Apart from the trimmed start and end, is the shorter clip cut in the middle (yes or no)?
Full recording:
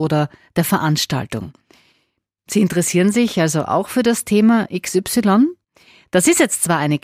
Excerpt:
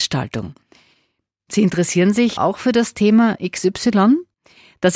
yes